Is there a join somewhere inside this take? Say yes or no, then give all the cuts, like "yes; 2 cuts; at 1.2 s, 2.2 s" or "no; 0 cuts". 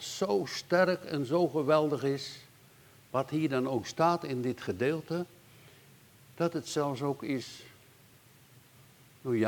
no; 0 cuts